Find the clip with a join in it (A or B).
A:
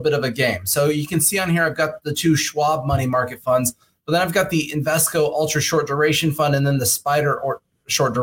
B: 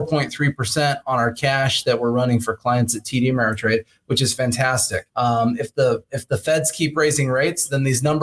B